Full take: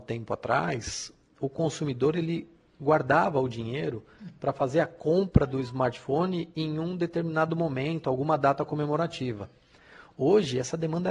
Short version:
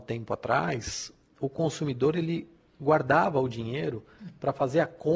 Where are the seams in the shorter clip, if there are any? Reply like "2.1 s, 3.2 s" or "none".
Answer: none